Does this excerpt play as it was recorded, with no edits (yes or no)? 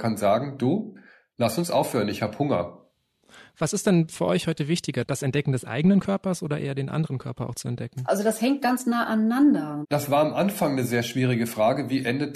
no